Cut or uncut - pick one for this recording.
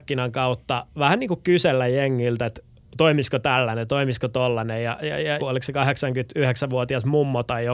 cut